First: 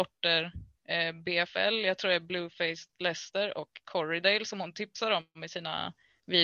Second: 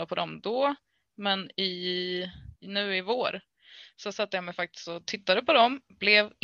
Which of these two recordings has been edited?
second; 1 cut; at 2.6 s

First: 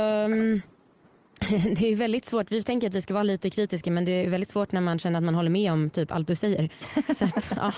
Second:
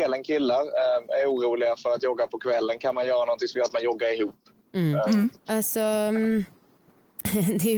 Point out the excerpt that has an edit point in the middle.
second; 1 cut; at 5.4 s

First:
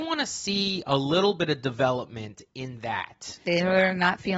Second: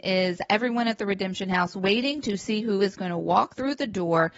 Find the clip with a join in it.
first; 1 cut; at 3.4 s

